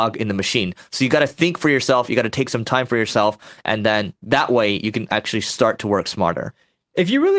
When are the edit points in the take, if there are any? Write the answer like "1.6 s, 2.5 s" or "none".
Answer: none